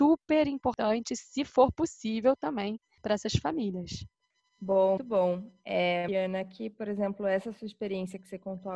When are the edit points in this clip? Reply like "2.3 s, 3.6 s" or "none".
5.0 s, 6.1 s